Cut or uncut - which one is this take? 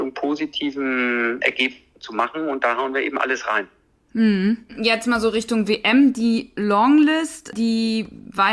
uncut